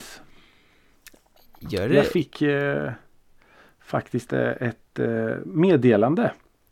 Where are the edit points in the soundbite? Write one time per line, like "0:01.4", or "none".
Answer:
0:04.3